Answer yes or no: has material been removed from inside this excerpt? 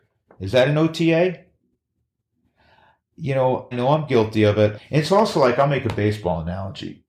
yes